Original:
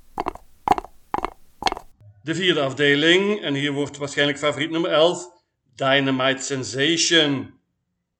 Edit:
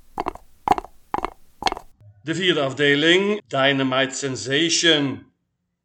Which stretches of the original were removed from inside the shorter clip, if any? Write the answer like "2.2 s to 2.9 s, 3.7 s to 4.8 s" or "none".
3.4 s to 5.7 s